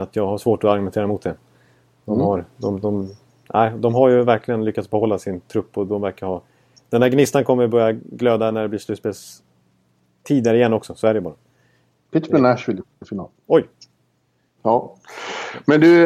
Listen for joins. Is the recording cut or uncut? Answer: cut